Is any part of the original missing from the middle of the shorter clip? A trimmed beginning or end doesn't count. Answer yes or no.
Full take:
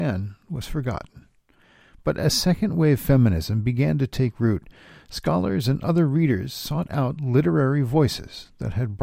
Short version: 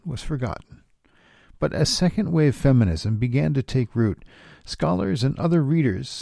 no